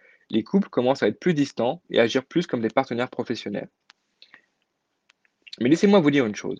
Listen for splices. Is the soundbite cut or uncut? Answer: uncut